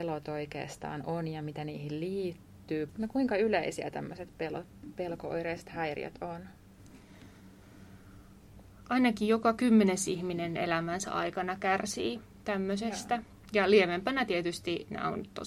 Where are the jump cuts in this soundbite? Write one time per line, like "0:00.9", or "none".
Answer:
0:02.9